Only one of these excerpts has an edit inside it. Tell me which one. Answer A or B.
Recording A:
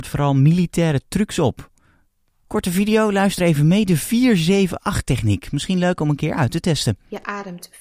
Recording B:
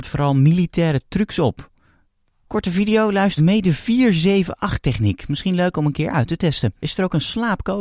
B